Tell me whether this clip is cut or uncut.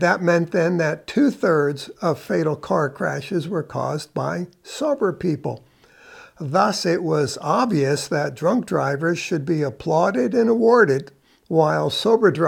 uncut